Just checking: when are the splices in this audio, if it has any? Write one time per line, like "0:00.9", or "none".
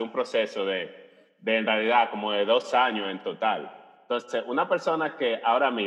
none